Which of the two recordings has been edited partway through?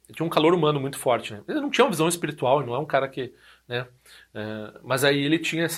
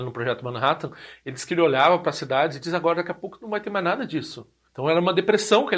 second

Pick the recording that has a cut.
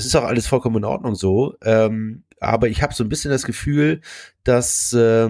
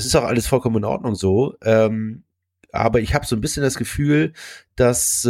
first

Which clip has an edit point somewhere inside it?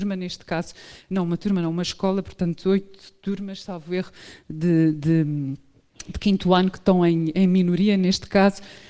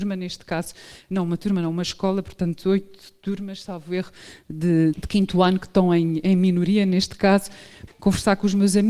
second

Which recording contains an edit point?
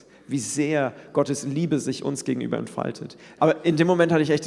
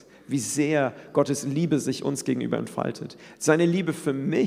first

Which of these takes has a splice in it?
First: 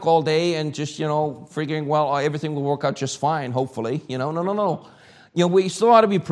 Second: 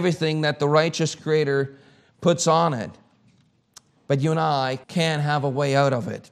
second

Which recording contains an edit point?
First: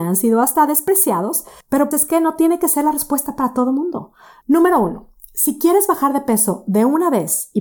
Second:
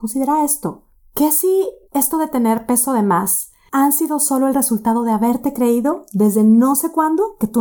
first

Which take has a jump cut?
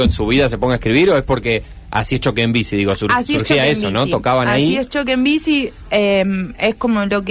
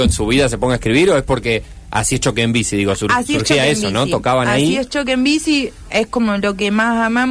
second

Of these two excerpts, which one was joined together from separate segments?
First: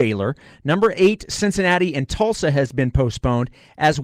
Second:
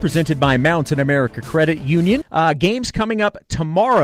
second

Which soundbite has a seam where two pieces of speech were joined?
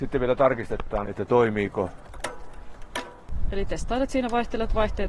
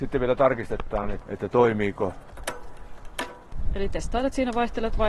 first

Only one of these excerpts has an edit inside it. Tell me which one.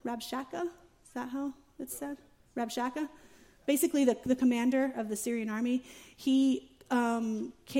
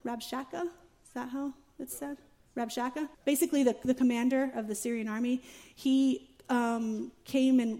second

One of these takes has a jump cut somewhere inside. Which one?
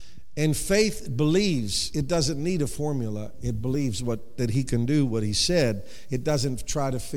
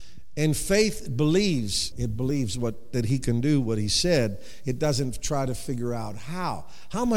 second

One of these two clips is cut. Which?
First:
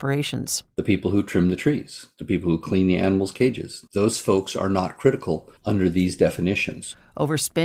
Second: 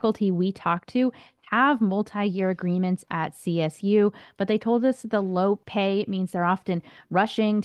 first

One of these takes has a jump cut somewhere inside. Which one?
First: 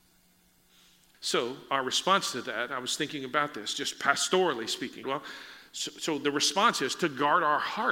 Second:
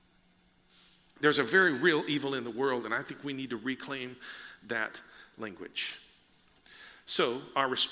first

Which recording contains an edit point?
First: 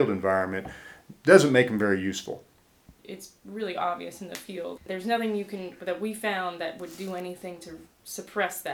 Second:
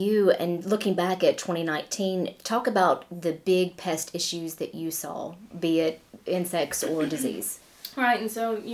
first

